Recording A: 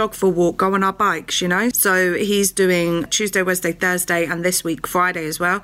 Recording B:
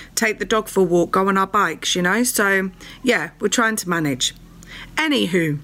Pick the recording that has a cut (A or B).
A